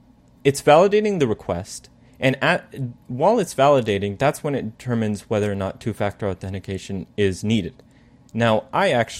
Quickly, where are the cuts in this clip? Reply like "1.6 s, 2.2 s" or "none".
none